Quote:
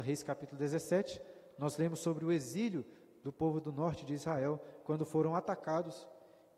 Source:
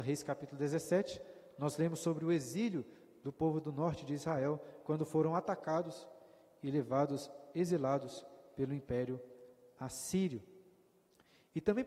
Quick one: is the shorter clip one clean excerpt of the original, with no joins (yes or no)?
yes